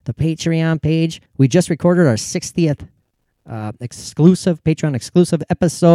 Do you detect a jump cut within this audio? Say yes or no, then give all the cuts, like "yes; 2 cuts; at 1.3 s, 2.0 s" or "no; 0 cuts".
yes; 1 cut; at 1.3 s